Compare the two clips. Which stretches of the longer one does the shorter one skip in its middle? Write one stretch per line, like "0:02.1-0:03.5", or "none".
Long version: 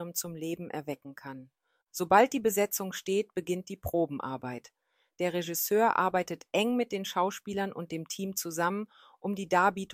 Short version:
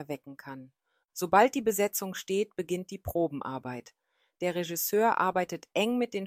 none